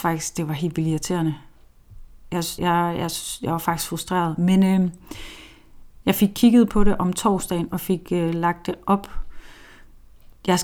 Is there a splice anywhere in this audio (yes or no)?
yes